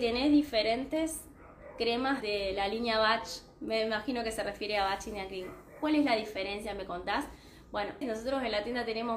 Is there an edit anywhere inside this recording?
yes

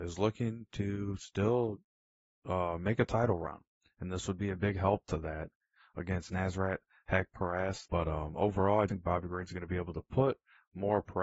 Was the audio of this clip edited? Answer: yes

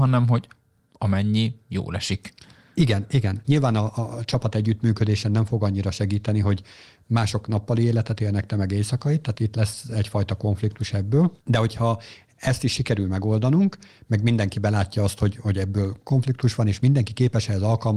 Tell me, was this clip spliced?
yes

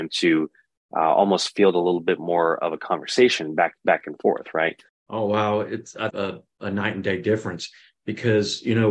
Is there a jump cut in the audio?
yes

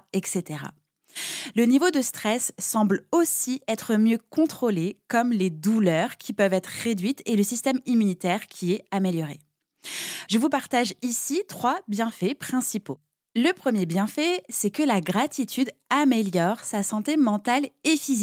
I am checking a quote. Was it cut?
yes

